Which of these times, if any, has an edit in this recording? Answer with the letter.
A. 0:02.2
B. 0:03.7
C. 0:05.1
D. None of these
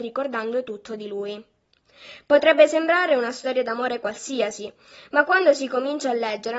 D